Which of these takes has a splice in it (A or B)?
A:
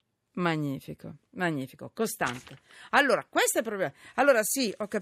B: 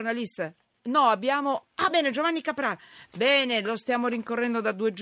B